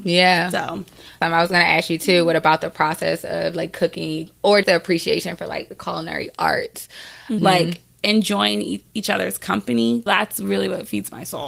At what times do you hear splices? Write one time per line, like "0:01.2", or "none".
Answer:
0:04.6
0:07.4
0:10.1